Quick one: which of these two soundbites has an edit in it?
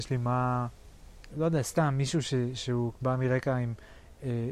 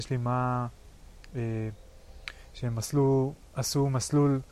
first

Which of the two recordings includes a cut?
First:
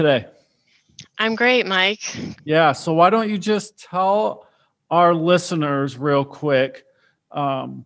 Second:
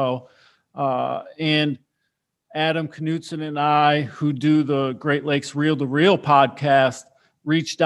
first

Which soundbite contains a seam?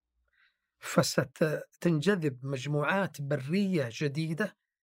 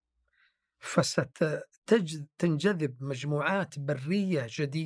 first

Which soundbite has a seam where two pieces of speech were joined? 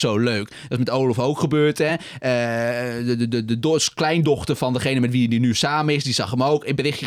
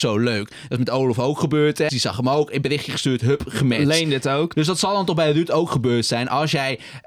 second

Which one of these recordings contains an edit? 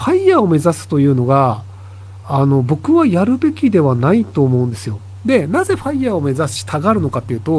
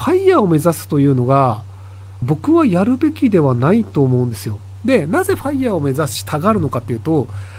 second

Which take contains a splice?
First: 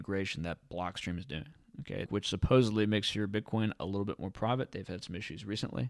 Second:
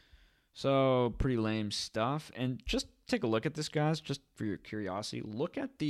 first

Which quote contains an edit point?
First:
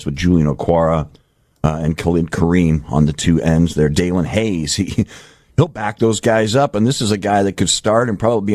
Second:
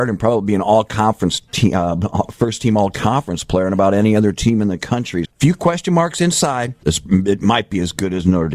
second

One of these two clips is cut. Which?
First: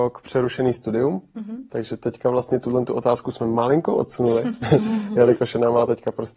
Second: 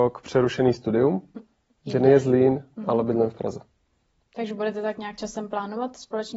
second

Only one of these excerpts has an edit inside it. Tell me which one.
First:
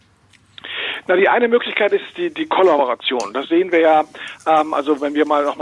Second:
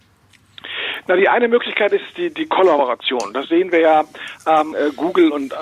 second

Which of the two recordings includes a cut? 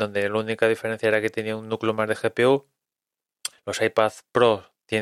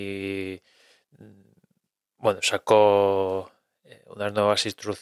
first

